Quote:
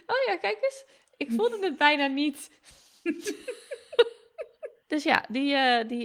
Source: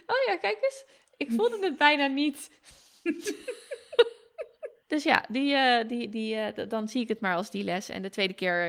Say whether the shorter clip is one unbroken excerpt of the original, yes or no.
yes